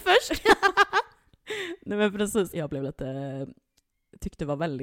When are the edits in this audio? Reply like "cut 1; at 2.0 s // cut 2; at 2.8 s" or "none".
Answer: cut 1; at 2.5 s

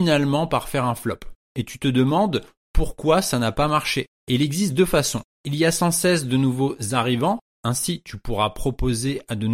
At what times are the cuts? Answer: cut 1; at 1.4 s // cut 2; at 4.2 s

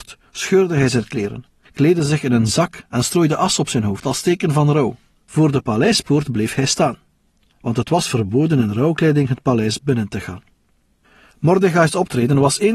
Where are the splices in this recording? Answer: cut 1; at 5.2 s

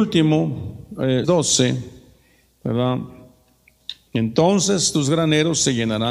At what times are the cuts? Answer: cut 1; at 1.2 s // cut 2; at 4.1 s

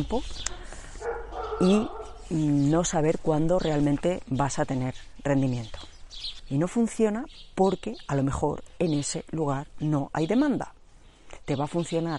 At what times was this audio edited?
cut 1; at 6.4 s

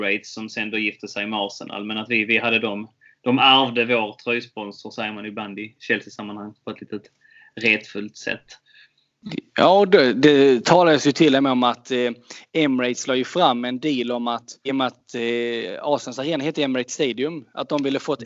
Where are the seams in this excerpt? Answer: cut 1; at 14.7 s

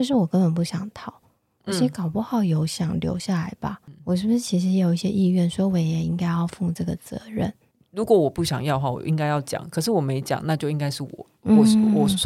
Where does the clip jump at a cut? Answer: none

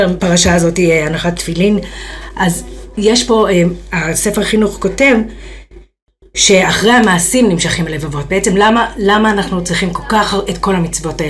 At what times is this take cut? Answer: none

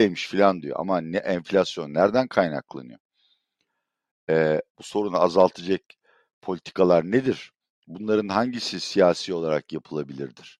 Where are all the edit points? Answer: none

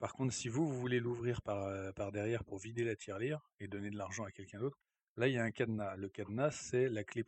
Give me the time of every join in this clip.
none

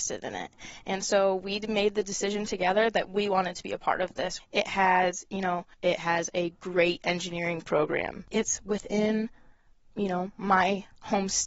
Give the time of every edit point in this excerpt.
cut 1; at 4.4 s // cut 2; at 5.7 s

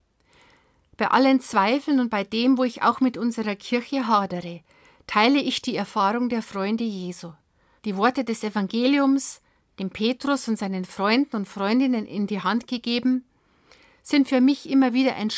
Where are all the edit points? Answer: cut 1; at 7.8 s

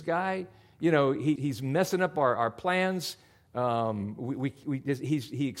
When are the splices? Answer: cut 1; at 1.4 s

